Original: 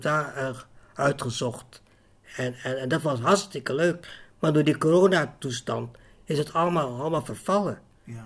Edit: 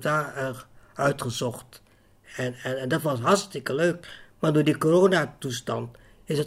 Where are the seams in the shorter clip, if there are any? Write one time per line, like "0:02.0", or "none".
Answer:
none